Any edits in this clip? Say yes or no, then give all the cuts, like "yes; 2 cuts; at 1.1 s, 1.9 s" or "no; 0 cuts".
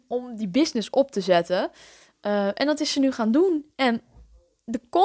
no; 0 cuts